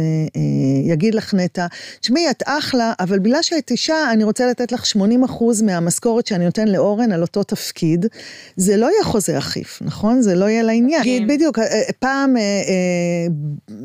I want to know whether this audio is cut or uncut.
cut